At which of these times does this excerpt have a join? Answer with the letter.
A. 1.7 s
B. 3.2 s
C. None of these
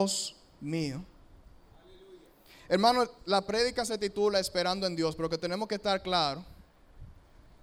C